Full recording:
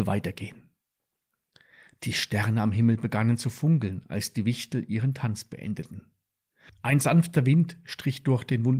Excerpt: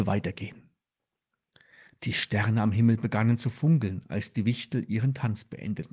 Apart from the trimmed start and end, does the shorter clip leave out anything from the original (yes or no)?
no